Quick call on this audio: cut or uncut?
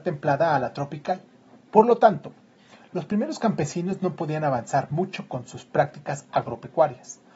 uncut